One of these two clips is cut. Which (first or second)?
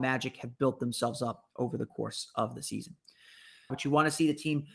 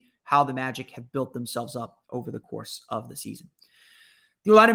first